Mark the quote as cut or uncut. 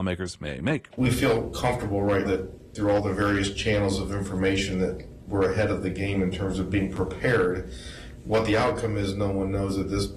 cut